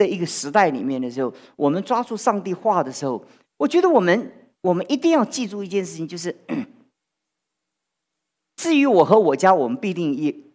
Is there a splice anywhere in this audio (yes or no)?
no